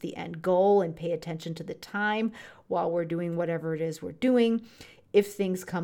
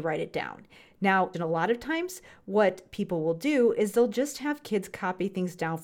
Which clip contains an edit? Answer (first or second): second